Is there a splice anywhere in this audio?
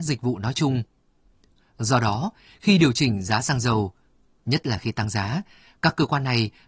no; 0 cuts

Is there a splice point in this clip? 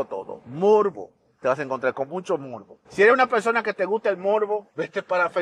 yes; 1 cut; at 2.8 s

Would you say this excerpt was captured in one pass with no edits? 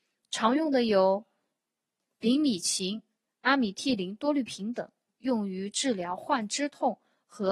yes; 0 cuts

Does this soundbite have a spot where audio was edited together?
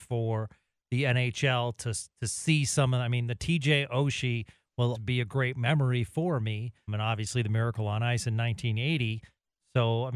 yes; 2 cuts; at 4.9 s, 6.9 s

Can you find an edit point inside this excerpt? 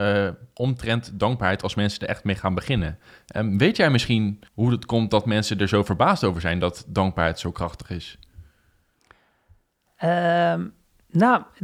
yes; 1 cut; at 4.5 s

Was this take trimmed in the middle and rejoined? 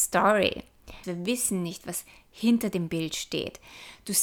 yes; 1 cut; at 1.0 s

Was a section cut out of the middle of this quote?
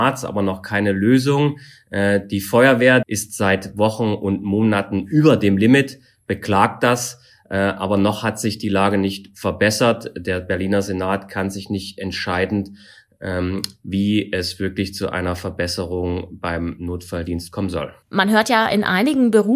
yes; 2 cuts; at 3.0 s, 18.0 s

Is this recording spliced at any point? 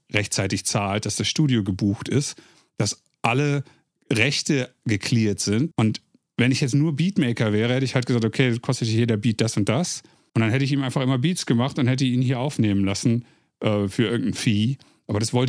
yes; 2 cuts; at 5.7 s, 10.3 s

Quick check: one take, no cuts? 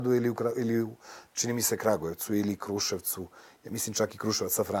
yes; 0 cuts

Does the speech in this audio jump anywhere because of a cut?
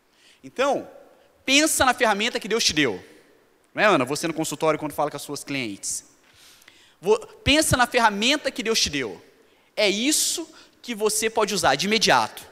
no; 0 cuts

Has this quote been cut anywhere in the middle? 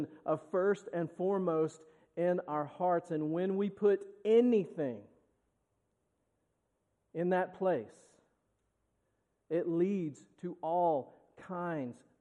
no; 0 cuts

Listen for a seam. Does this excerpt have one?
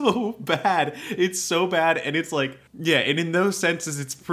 yes; 1 cut; at 2.7 s

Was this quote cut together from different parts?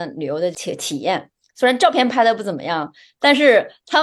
no; 0 cuts

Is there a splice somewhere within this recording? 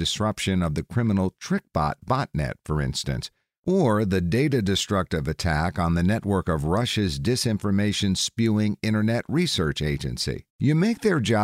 yes; 1 cut; at 10.5 s

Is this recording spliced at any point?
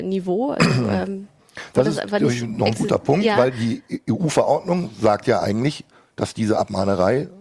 no; 0 cuts

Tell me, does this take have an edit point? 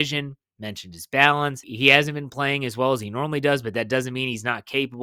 yes; 1 cut; at 1.6 s

